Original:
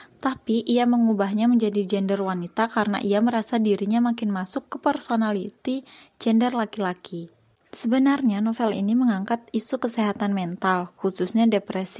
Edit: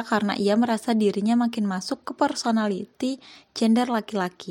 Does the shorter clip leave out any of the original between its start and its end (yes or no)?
no